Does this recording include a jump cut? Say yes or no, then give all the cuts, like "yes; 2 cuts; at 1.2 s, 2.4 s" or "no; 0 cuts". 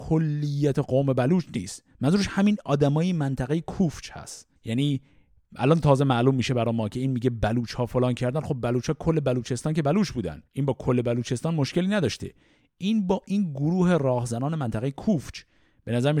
yes; 2 cuts; at 4.6 s, 10.5 s